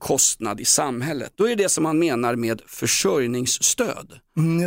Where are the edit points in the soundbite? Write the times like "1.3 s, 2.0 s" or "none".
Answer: 1.3 s